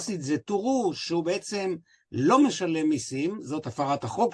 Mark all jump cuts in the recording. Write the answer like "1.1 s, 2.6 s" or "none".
none